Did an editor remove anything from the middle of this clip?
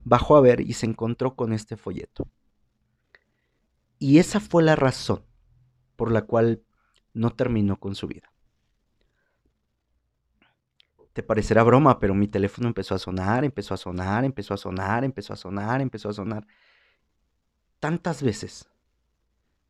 no; 0 cuts

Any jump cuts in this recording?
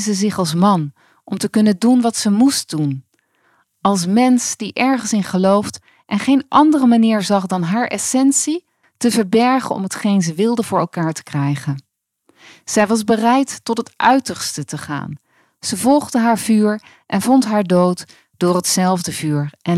yes; 1 cut; at 8.8 s

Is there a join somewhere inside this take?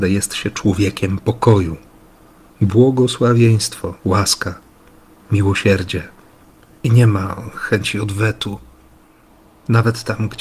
yes; 1 cut; at 4.0 s

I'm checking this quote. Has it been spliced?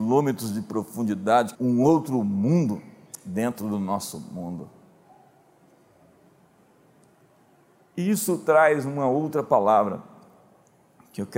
yes; 1 cut; at 1.5 s

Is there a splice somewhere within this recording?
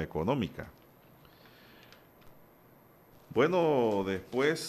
yes; 1 cut; at 3.1 s

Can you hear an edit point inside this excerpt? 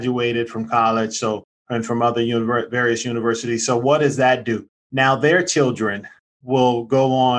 no; 0 cuts

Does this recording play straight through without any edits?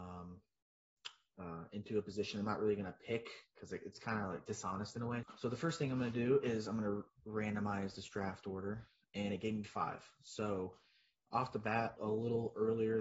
no; 2 cuts; at 5.2 s, 12.0 s

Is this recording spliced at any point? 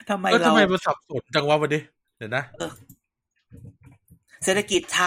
yes; 1 cut; at 2.6 s

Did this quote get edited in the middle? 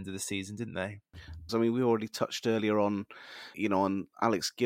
yes; 2 cuts; at 1.5 s, 3.5 s

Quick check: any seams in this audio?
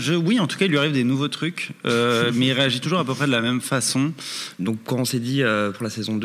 yes; 1 cut; at 4.6 s

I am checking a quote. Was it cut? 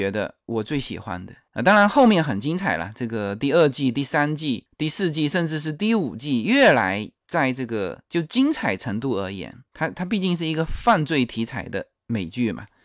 no; 0 cuts

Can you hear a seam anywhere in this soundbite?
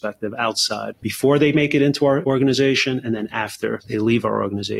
yes; 1 cut; at 1.0 s

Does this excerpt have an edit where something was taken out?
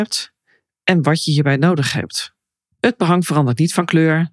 yes; 1 cut; at 2.7 s

